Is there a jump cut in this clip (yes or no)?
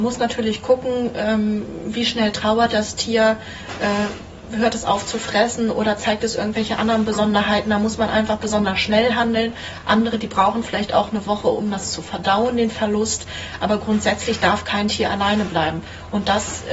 no